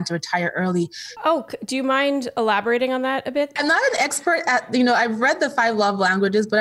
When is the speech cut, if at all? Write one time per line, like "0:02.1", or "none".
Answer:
0:01.2
0:03.6